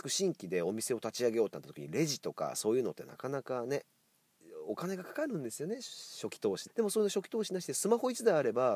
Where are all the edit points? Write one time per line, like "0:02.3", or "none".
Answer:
0:06.7